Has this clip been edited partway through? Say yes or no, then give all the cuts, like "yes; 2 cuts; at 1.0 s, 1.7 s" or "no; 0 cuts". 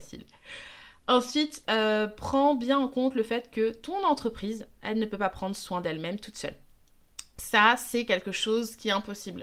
no; 0 cuts